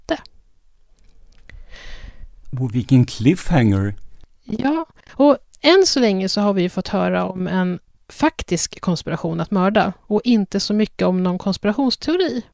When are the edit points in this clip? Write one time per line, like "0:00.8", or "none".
0:02.5